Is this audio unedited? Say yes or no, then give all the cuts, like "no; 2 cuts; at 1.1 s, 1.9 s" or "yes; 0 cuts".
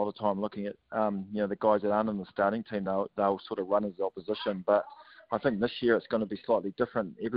yes; 0 cuts